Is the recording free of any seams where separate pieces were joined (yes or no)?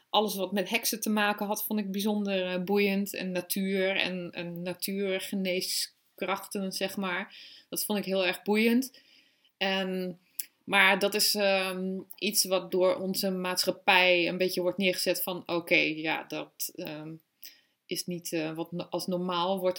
yes